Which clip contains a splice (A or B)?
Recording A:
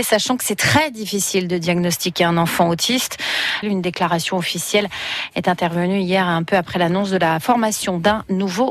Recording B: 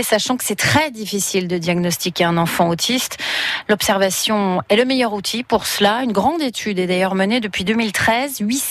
A